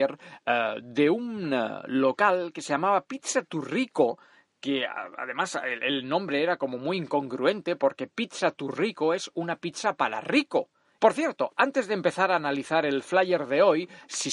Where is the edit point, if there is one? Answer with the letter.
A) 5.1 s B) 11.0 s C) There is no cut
B